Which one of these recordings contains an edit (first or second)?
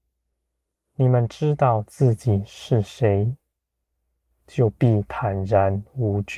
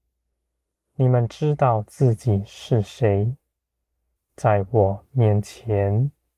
second